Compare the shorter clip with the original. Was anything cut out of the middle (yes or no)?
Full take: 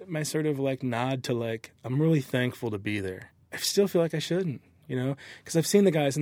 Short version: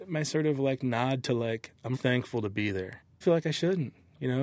yes